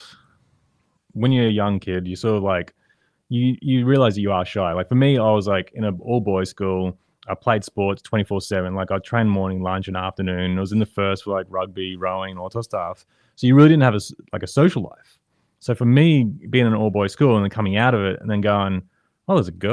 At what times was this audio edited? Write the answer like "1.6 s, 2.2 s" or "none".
1.0 s